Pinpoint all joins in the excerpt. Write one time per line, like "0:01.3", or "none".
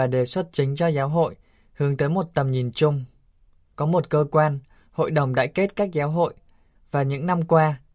0:03.7
0:06.8

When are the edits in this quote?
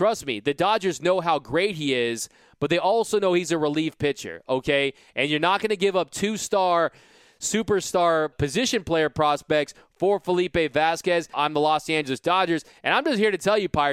0:08.3
0:11.3

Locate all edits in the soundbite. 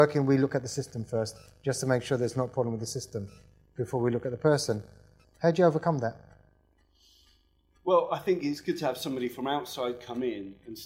0:05.2

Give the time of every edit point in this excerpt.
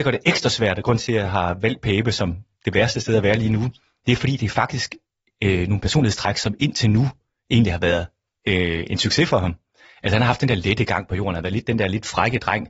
none

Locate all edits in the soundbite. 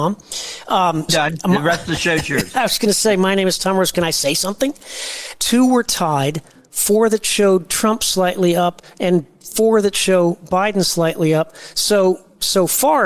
0:01.1
0:05.4

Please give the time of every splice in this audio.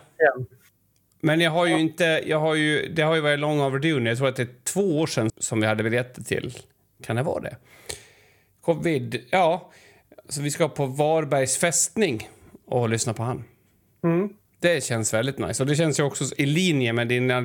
0:05.3

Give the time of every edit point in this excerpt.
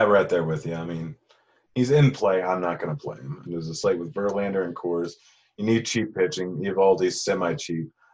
0:03.5

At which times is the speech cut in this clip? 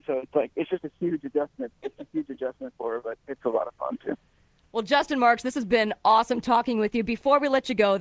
none

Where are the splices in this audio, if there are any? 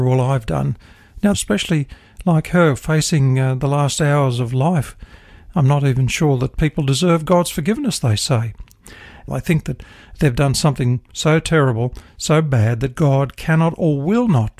0:01.3
0:09.3

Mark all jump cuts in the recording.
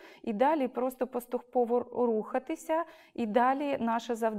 none

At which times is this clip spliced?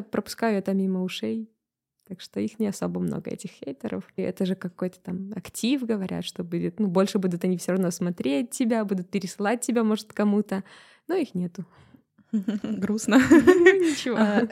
0:04.2

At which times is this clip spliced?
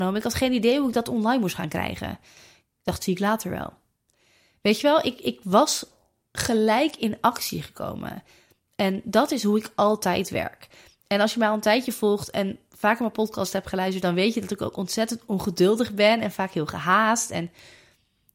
none

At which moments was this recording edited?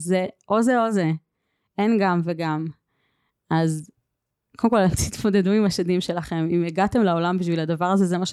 none

